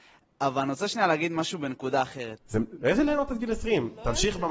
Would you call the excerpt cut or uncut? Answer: cut